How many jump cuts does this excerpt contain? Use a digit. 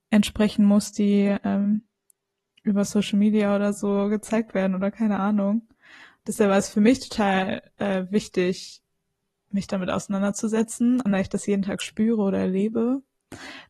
1